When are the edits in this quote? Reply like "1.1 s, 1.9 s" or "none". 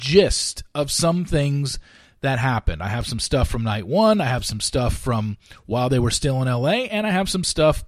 none